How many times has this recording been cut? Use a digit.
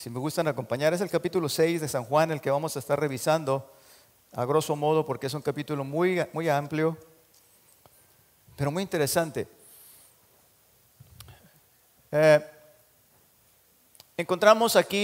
0